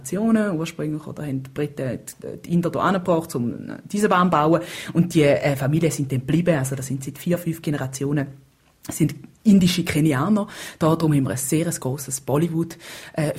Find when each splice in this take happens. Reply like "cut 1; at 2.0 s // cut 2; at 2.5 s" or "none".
none